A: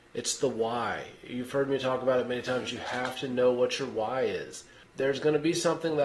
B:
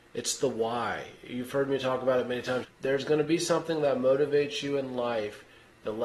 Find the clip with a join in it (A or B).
B